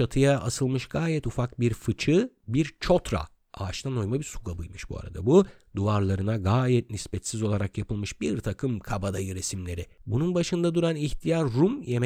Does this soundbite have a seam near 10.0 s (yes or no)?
yes